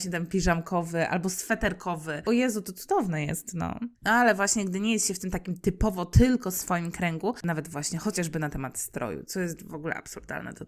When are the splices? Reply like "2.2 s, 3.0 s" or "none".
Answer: 3.9 s, 7.4 s